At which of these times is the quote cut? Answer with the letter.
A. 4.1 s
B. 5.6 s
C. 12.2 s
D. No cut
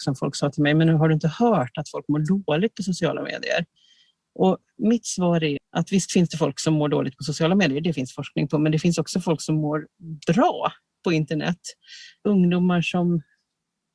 B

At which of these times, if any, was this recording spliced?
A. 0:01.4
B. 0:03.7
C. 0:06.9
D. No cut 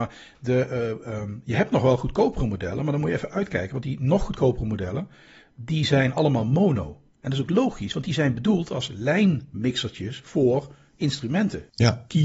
D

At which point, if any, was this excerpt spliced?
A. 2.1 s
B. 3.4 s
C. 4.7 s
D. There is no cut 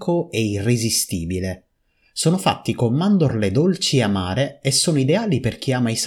D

